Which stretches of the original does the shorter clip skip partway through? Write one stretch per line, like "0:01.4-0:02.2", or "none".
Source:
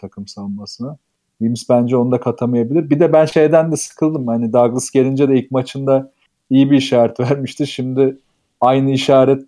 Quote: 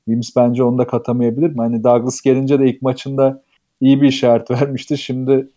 0:02.9-0:04.2